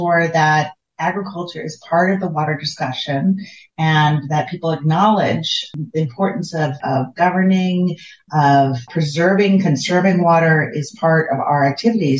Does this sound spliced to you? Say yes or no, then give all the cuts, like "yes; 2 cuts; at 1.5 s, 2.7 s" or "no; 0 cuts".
yes; 2 cuts; at 6.8 s, 8.9 s